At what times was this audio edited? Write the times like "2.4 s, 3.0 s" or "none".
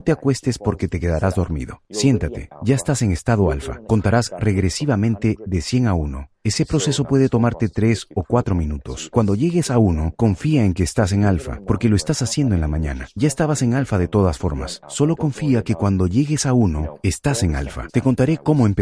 9.1 s, 17.9 s

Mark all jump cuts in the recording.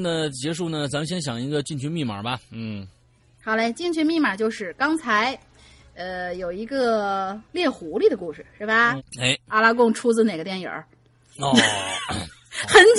7.5 s, 9.0 s

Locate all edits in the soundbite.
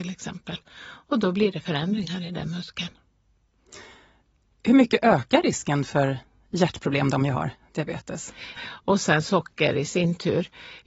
8.6 s

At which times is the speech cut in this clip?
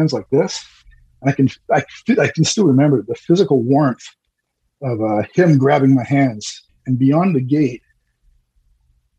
6.7 s

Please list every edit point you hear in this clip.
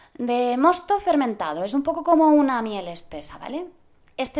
none

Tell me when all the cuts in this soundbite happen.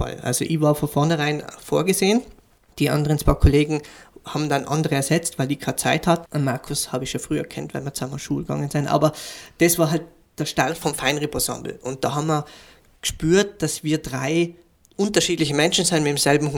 6.3 s

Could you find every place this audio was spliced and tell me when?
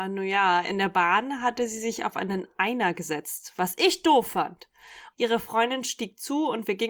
5.1 s

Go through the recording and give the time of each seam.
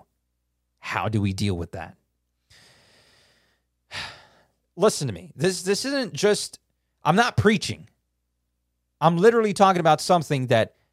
4.6 s

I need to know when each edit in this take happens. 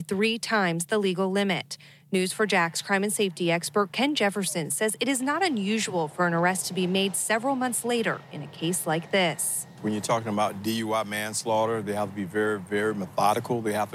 none

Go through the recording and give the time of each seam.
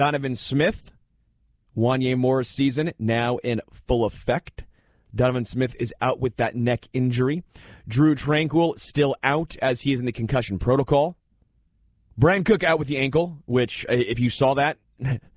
12.1 s

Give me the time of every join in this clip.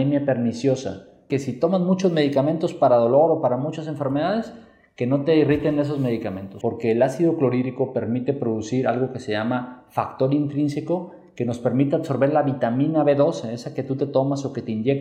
1.3 s, 6.6 s

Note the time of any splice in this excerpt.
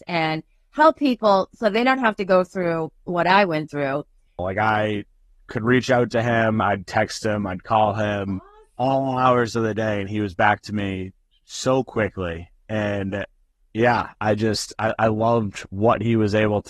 4.4 s

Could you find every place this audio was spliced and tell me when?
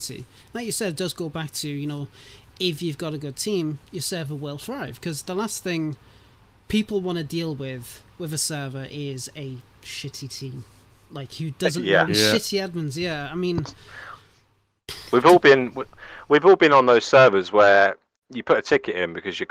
12.1 s, 14.2 s

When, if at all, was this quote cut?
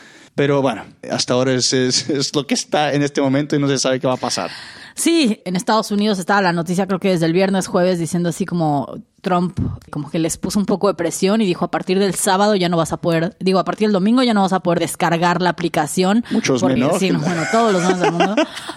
16.8 s

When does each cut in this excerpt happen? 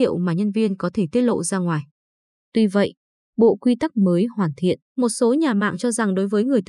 3.2 s, 4.9 s

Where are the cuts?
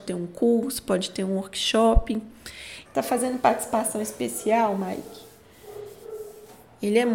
2.9 s

